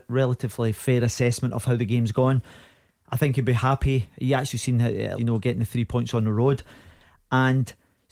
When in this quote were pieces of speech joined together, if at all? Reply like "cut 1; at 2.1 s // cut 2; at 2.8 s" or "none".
cut 1; at 5.2 s